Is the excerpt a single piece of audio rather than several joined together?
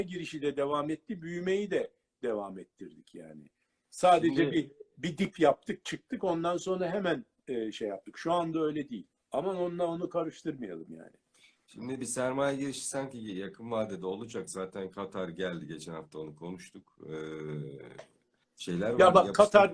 yes; 0 cuts

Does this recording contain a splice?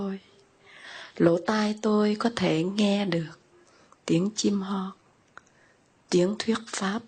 no; 0 cuts

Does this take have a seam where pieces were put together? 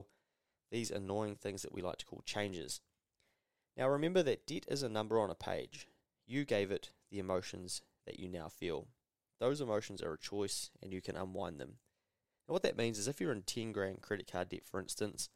no; 0 cuts

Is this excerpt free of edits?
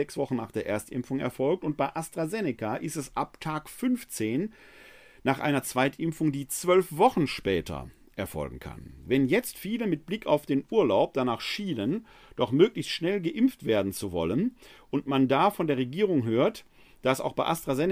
yes; 0 cuts

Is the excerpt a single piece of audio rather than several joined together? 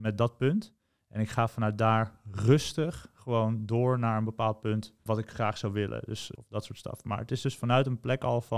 no; 2 cuts; at 5.1 s, 6.3 s

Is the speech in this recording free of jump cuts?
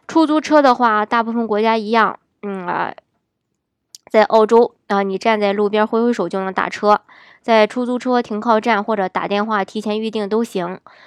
yes; 0 cuts

